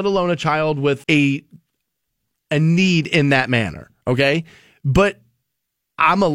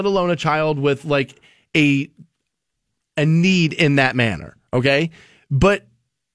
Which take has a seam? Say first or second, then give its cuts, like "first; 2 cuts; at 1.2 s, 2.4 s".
first; 1 cut; at 1.0 s